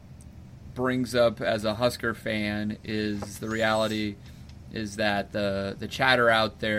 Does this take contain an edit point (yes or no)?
no